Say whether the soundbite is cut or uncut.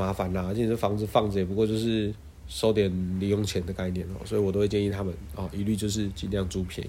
uncut